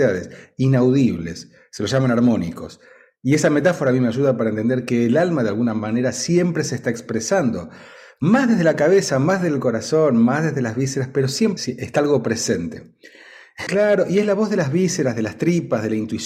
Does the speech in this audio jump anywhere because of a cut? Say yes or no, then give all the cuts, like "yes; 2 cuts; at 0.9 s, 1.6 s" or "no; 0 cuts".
yes; 2 cuts; at 11.6 s, 13.7 s